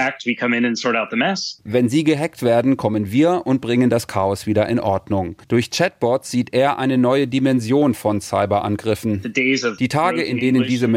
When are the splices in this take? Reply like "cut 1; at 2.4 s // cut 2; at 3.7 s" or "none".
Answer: cut 1; at 5.4 s